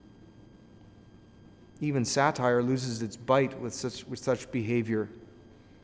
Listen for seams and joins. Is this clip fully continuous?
yes; 0 cuts

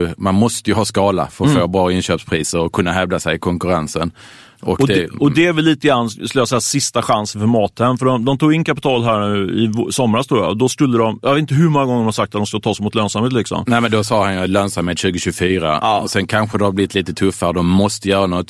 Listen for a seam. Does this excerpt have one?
no; 0 cuts

